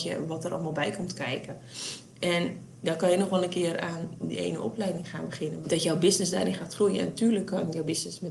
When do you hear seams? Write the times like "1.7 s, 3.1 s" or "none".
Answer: 4.2 s, 5.6 s